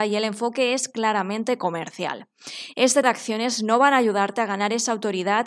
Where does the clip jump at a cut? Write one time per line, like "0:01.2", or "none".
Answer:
0:03.0